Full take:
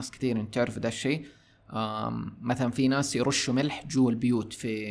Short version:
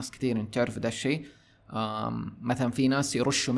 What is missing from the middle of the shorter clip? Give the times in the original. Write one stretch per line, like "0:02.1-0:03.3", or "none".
none

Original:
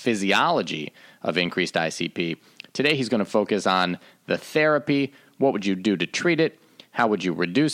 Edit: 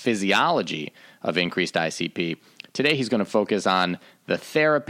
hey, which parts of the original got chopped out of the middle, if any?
none

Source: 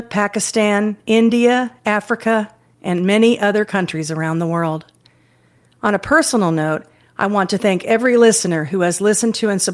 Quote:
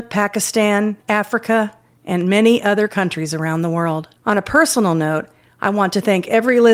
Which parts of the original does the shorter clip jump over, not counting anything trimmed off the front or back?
0:01.0-0:01.8
0:04.9-0:05.7

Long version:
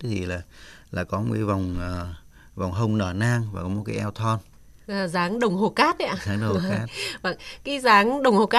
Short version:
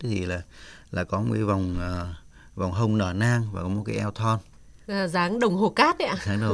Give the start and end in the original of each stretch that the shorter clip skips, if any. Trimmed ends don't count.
none

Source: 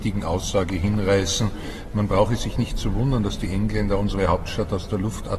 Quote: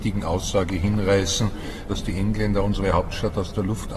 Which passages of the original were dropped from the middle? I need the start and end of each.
0:01.9-0:03.2

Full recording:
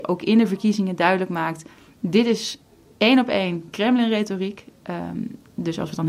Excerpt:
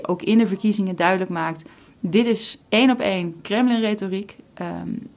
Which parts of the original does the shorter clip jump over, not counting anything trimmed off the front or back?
0:02.7-0:02.9

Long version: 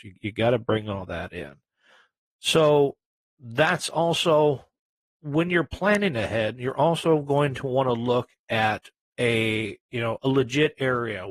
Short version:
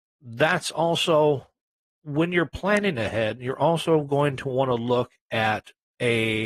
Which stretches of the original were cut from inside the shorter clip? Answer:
none

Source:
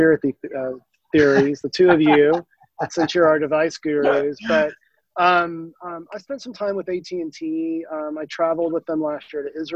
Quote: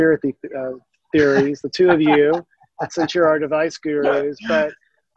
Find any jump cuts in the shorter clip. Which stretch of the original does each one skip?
none

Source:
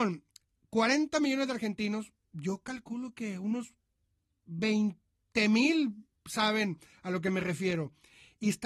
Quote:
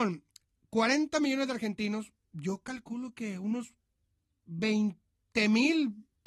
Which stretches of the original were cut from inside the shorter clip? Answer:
none

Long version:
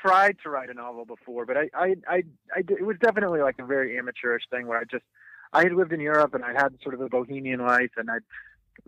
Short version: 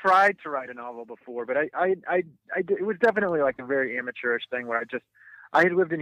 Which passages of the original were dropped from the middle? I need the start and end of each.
none

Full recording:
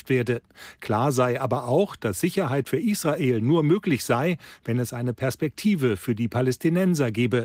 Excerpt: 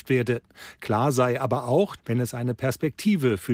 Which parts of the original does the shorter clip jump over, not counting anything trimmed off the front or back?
0:02.0-0:04.6

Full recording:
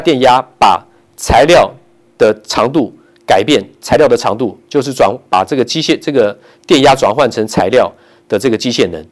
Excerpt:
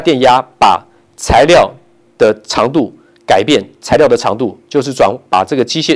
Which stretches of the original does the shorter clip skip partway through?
none

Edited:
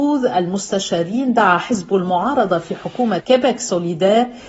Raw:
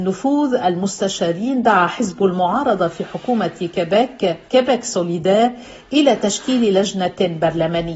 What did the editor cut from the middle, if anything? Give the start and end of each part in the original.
0:03.5-0:04.4

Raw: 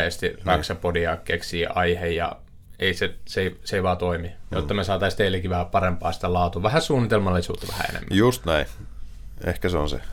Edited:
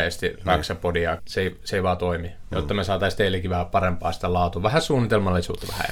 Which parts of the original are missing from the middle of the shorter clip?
0:01.2-0:03.2

